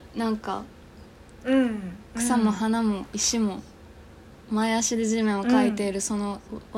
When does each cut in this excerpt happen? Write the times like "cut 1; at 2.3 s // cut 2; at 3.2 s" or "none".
none